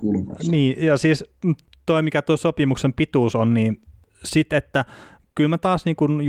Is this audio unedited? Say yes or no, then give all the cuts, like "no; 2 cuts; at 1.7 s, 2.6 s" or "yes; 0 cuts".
yes; 0 cuts